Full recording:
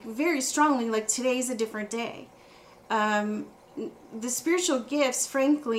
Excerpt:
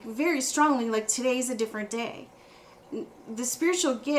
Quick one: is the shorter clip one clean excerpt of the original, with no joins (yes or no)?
no